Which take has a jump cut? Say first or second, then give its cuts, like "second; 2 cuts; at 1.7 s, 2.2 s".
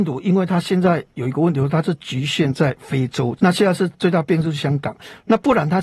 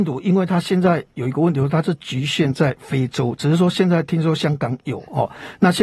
first; 1 cut; at 3.4 s